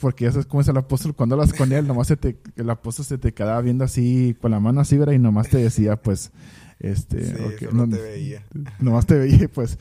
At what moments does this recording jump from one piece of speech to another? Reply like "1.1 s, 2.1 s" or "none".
none

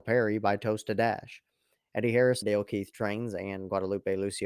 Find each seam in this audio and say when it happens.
2.4 s

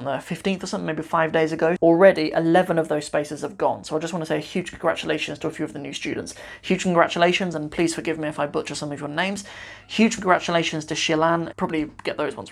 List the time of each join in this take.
1.8 s, 11.5 s

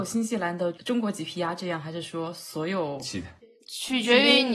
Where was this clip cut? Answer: none

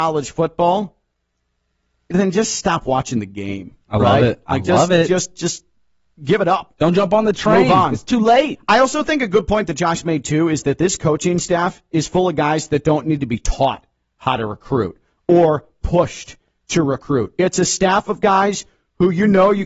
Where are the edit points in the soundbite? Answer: none

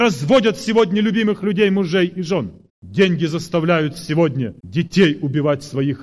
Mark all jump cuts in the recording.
2.7 s, 4.6 s

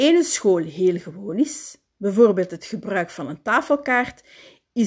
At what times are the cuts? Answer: none

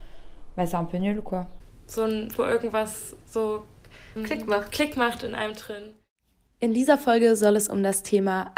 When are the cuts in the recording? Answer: 2.4 s, 4.2 s, 6.5 s

